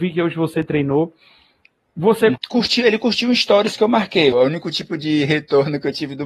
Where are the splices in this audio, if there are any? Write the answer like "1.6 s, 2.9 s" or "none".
2.4 s, 4.3 s